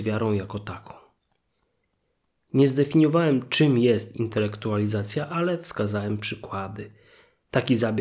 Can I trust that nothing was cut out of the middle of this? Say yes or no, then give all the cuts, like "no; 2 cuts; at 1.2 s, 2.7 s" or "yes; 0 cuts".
yes; 0 cuts